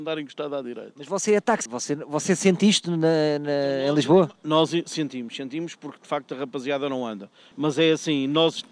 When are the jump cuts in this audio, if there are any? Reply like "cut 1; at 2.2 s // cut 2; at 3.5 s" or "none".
cut 1; at 1.7 s // cut 2; at 7.5 s